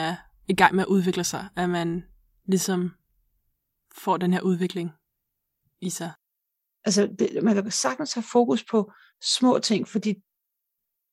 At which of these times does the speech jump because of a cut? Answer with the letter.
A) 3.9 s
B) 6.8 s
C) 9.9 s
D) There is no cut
B